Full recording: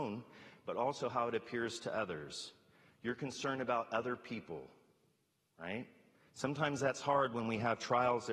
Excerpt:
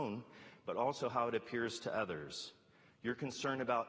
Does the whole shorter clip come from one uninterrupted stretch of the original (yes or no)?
yes